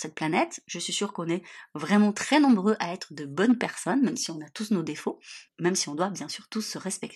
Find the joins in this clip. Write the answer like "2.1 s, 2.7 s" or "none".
5.5 s